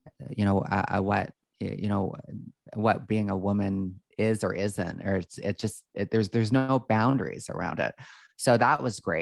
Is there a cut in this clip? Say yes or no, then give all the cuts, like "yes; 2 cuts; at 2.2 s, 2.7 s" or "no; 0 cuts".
no; 0 cuts